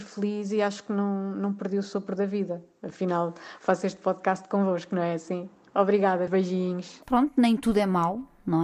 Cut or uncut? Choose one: cut